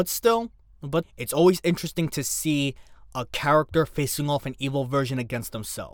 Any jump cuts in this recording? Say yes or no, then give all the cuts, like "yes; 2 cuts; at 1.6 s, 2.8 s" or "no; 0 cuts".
yes; 1 cut; at 1.0 s